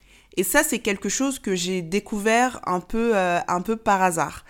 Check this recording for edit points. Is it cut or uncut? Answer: uncut